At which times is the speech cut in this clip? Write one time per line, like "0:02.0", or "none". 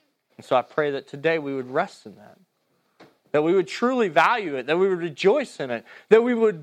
none